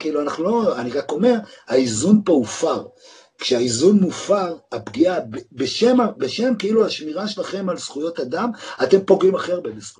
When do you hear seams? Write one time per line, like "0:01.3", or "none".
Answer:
none